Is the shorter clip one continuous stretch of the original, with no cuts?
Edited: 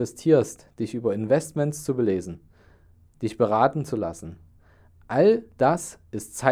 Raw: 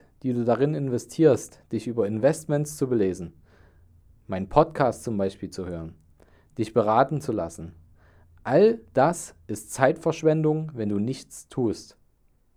no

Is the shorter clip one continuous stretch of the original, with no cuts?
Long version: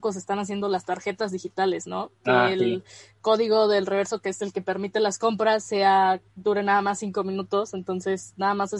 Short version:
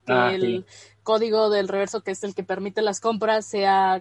yes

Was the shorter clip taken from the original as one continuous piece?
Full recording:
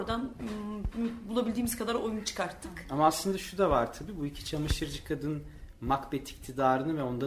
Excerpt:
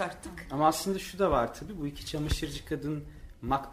yes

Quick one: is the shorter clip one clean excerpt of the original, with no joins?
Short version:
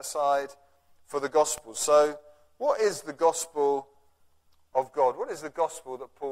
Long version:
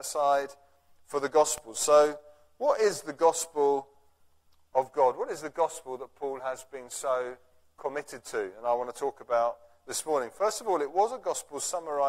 yes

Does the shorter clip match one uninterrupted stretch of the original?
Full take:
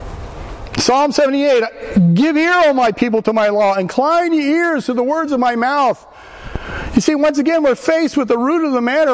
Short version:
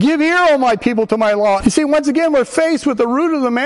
no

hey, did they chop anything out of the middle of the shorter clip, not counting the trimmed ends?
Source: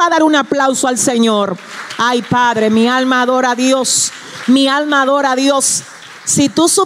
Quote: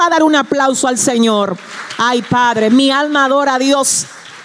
yes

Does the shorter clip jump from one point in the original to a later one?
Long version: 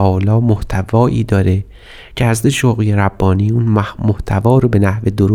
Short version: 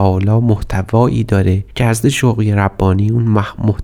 yes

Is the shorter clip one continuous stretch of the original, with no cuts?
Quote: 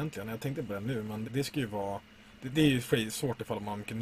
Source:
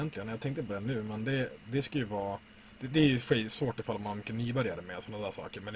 no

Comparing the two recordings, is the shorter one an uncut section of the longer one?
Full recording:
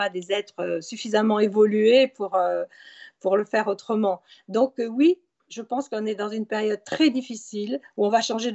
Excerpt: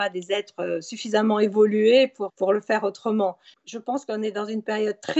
no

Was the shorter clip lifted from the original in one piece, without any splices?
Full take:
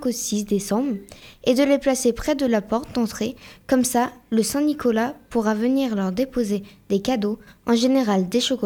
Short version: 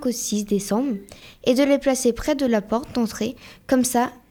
yes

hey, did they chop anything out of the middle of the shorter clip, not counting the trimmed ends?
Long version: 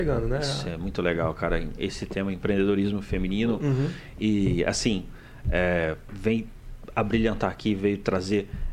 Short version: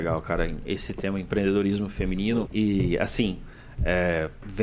yes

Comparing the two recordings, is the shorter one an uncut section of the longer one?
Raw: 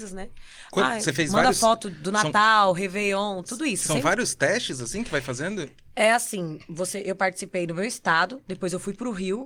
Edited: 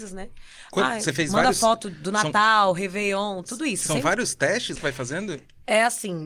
no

